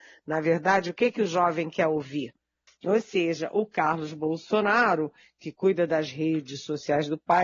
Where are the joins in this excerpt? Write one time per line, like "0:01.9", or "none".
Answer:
0:02.7